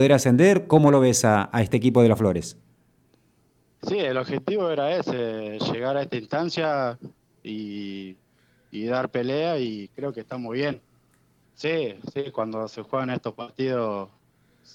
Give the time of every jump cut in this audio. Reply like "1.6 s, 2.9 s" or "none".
11.4 s